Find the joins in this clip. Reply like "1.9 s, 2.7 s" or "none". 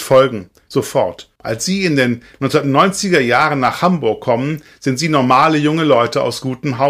1.4 s